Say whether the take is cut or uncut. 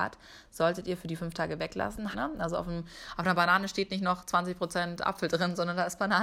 cut